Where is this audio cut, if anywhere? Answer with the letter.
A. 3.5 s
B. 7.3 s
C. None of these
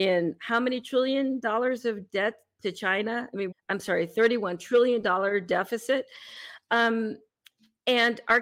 A